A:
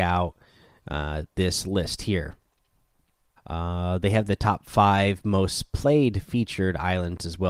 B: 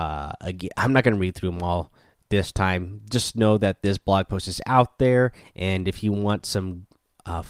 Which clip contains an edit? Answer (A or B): A